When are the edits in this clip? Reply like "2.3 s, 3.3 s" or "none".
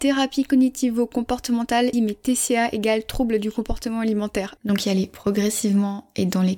1.9 s, 4.6 s